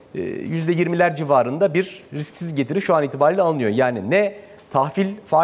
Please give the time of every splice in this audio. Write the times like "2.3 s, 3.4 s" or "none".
none